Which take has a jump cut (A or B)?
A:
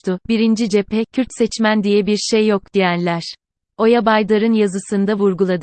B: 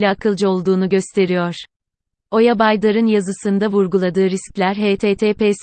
A